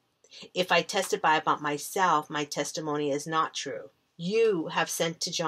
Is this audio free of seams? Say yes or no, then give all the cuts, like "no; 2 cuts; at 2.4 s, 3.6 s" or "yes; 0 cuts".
no; 1 cut; at 4.1 s